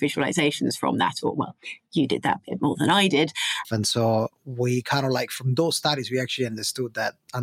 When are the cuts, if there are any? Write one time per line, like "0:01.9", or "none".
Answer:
0:03.6